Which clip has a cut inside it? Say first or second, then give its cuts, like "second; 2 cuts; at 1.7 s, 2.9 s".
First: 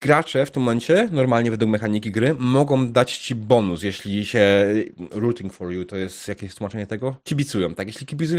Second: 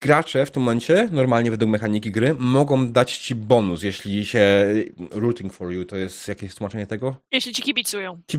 first; 1 cut; at 7.2 s